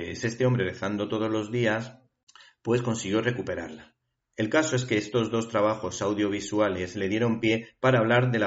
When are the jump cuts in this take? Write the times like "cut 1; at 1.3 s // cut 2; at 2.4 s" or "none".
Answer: cut 1; at 4.2 s